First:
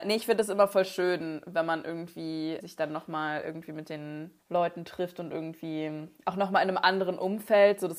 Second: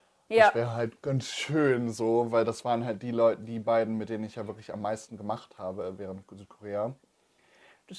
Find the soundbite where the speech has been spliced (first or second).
first